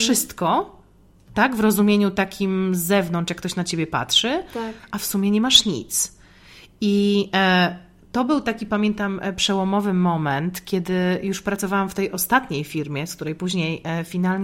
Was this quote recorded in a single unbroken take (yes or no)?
yes